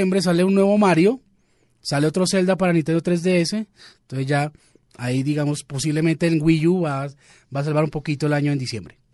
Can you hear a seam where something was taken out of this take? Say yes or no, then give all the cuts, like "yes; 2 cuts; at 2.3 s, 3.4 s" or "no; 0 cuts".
no; 0 cuts